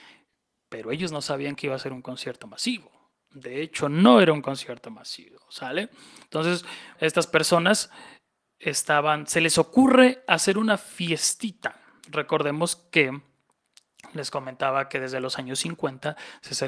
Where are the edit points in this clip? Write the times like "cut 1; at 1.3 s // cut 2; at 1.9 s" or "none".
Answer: cut 1; at 7.0 s